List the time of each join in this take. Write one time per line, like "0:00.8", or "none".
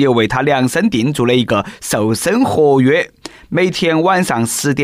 none